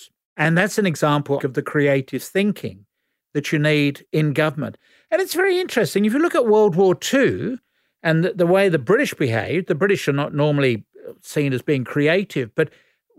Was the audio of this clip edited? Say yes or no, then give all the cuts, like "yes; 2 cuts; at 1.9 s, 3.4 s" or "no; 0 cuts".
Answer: yes; 1 cut; at 1.4 s